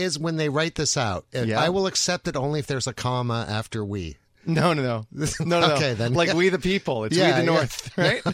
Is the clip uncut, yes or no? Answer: yes